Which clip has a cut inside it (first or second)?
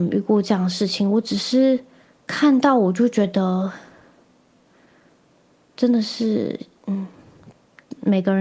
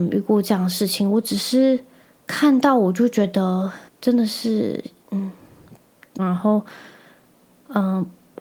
second